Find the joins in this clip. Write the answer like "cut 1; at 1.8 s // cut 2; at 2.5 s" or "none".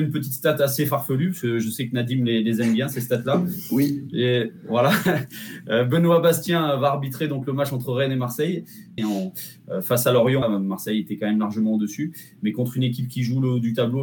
cut 1; at 9.0 s // cut 2; at 10.4 s